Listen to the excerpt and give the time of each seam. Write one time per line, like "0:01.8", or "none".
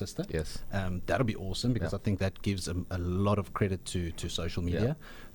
none